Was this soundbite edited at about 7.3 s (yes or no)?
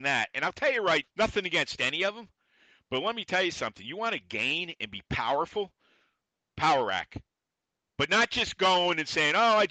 no